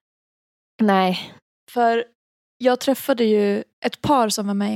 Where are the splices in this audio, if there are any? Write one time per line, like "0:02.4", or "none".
0:03.7